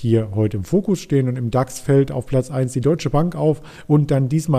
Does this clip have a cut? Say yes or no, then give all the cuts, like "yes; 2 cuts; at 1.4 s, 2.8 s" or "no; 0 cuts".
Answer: no; 0 cuts